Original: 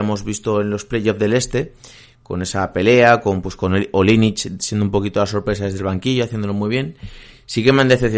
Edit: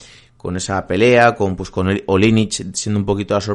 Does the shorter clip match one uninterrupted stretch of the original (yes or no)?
yes